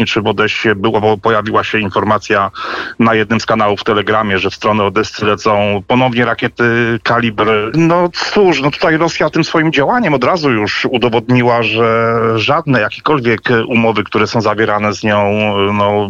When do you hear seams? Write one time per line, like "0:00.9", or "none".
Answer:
0:07.7